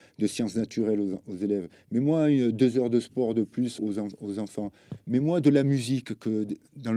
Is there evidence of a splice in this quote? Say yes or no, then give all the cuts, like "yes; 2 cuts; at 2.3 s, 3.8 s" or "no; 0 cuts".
yes; 1 cut; at 3.8 s